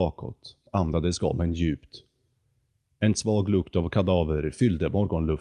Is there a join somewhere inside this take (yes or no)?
no